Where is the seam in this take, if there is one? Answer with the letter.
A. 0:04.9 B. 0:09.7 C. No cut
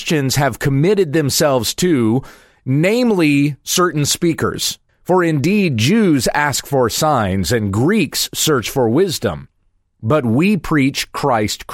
A